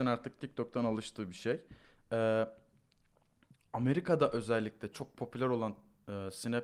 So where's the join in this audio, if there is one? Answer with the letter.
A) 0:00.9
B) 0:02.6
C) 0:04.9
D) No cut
C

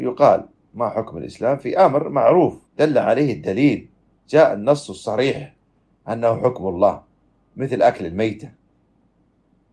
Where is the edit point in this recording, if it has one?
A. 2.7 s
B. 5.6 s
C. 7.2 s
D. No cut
A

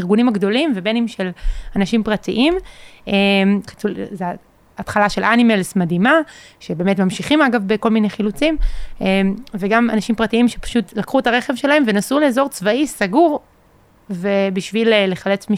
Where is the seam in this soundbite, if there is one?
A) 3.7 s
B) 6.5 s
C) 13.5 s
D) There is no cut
A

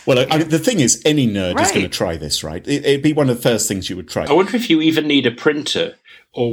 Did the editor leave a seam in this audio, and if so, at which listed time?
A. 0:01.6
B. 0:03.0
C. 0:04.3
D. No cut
C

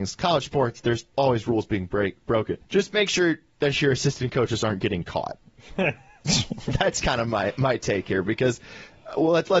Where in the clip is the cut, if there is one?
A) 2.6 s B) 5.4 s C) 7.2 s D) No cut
A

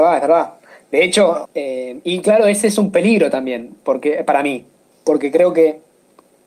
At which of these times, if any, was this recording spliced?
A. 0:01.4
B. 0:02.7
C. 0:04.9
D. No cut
A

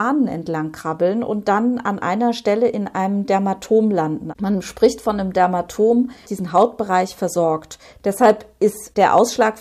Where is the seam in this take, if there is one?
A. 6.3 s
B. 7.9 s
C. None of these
A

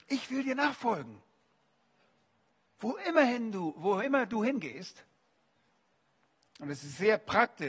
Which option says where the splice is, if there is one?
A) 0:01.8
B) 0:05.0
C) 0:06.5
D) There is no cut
C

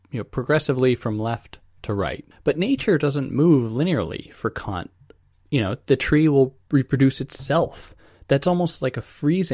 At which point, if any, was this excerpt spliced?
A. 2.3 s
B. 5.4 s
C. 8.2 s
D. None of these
A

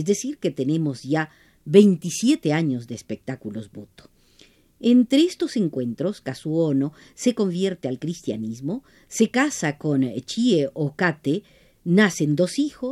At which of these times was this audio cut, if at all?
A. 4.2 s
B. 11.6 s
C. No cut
C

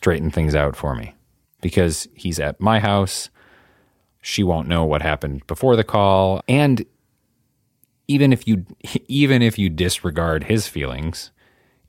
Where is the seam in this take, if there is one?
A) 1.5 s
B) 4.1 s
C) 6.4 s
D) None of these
C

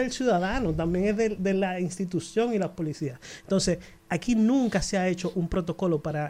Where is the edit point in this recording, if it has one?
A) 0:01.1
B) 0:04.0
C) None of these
B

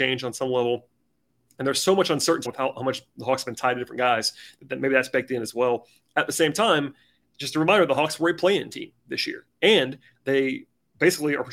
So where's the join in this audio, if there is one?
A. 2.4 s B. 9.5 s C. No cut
A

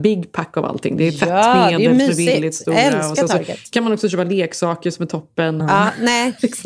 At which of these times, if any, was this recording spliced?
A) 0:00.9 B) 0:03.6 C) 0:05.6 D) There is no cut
C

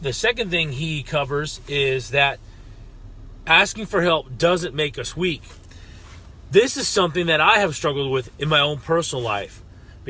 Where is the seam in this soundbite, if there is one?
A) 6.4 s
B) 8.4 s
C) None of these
C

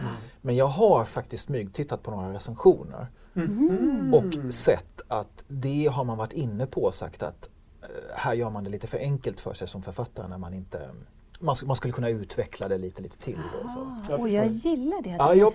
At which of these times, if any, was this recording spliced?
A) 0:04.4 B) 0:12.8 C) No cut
C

